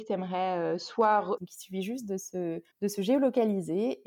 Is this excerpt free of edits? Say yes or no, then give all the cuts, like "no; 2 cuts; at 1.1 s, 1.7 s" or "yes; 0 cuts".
no; 2 cuts; at 1.4 s, 2.7 s